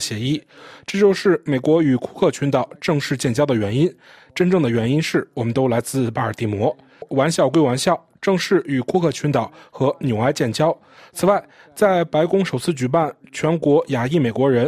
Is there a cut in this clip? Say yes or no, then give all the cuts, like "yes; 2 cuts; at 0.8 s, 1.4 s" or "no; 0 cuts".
no; 0 cuts